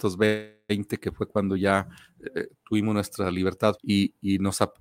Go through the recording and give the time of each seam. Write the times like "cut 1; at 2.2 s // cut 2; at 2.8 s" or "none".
cut 1; at 3.8 s